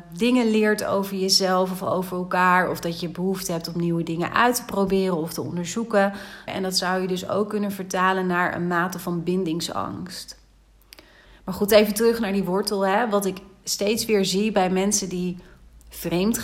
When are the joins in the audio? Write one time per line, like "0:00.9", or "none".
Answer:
0:06.5
0:11.3